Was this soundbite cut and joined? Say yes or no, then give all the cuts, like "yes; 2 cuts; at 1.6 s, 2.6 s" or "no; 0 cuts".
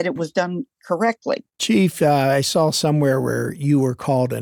yes; 1 cut; at 1.5 s